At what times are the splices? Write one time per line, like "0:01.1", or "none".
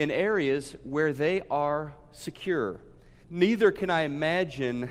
0:03.2